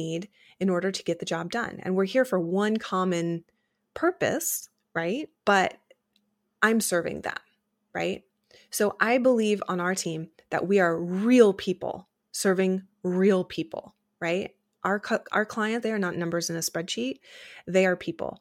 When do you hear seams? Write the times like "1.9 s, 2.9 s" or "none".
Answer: 5.4 s, 15.8 s